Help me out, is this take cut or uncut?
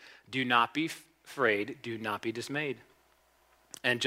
uncut